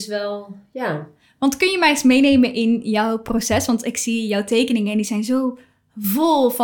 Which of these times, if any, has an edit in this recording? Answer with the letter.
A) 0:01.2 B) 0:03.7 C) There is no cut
C